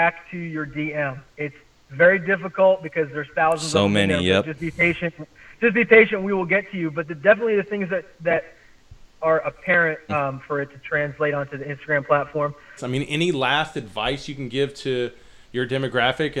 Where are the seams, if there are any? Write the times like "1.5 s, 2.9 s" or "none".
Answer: 10.1 s, 12.8 s